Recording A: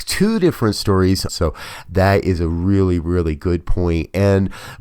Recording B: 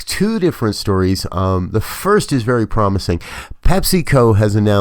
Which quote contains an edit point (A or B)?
A